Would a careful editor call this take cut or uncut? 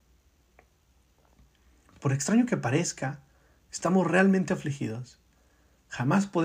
uncut